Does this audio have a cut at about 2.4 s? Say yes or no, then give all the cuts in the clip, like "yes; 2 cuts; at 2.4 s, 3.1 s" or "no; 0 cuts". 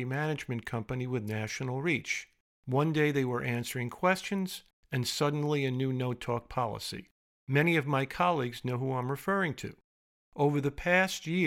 no; 0 cuts